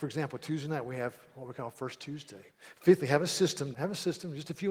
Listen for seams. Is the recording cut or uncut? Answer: cut